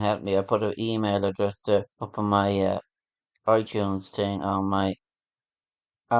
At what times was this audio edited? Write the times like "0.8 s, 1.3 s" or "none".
1.9 s